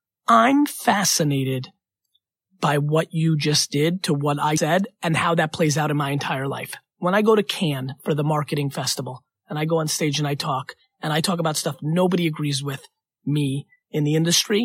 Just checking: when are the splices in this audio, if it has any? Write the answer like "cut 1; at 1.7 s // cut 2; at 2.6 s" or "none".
cut 1; at 4.6 s